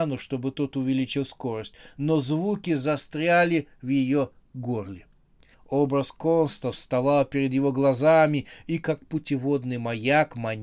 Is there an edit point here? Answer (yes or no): yes